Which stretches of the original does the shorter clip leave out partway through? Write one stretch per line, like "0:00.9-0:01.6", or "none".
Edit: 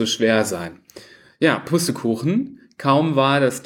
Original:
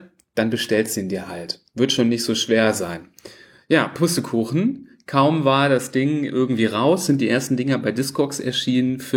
none